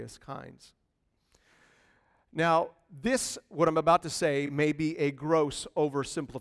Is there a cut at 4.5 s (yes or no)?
no